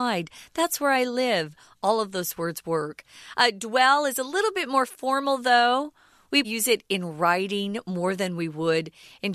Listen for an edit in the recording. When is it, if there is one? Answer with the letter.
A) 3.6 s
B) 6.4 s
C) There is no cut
B